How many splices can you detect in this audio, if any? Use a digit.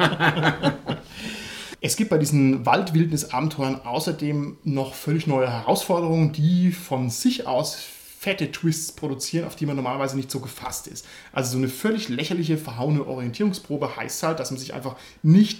0